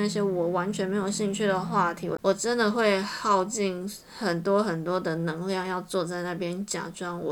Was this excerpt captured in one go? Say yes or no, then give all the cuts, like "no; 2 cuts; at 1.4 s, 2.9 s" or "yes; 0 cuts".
yes; 0 cuts